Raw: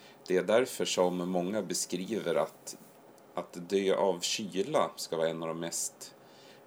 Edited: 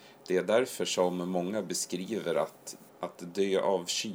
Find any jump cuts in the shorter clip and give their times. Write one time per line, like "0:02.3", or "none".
0:02.9

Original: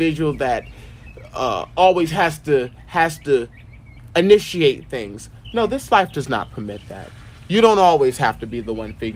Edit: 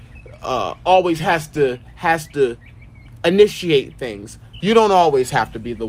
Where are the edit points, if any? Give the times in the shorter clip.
0:04.6

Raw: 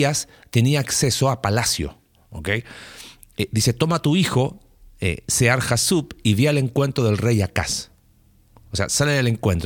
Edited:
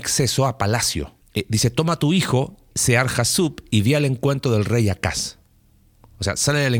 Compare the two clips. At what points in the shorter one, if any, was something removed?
0:01.2
0:02.7

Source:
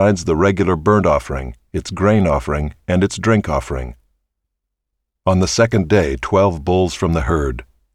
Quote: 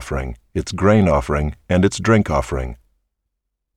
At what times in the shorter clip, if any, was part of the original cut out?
none

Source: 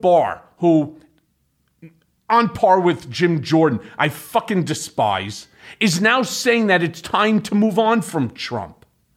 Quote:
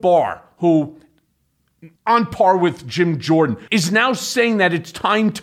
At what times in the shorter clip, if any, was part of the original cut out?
0:02.0
0:03.7

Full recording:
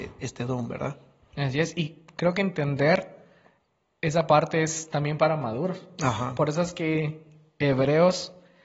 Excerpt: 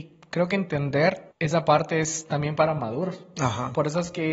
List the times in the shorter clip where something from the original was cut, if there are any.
0:01.3

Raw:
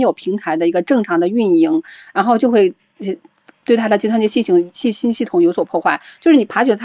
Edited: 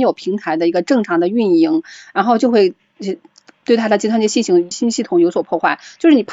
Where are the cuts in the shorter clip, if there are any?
0:04.7

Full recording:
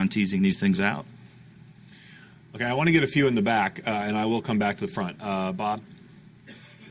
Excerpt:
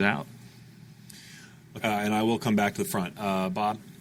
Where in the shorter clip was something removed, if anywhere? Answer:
0:01.8

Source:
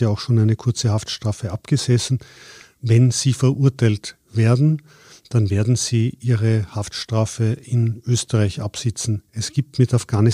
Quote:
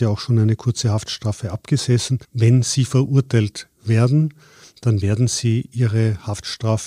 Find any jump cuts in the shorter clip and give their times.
0:02.2

